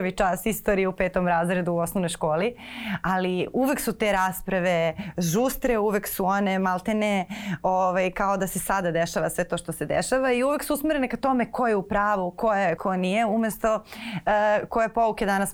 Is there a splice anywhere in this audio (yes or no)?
yes